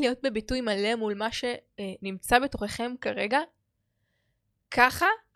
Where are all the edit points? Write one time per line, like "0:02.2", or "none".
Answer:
none

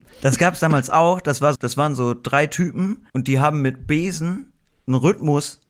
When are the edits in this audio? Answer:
0:01.5
0:03.1

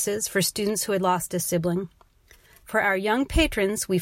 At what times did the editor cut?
none

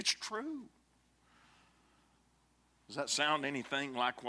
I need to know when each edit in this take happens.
none

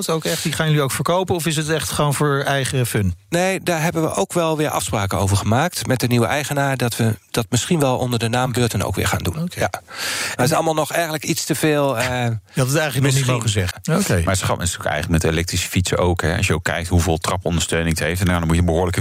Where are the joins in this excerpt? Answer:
0:13.7

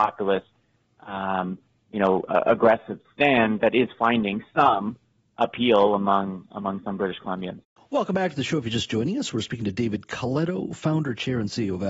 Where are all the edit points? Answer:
0:03.6

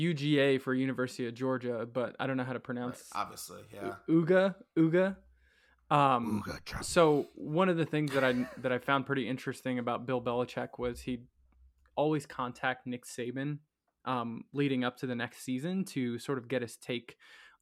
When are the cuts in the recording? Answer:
0:06.8

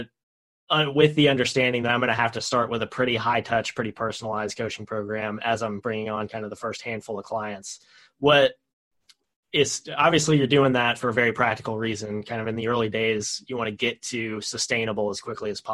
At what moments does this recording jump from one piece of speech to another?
none

